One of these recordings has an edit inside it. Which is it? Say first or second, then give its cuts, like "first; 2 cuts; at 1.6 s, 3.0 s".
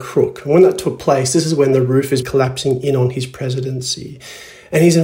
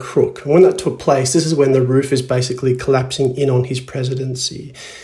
first; 1 cut; at 2.2 s